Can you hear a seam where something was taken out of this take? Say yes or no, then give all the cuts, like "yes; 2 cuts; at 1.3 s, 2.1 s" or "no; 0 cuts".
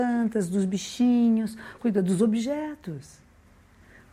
yes; 1 cut; at 1.8 s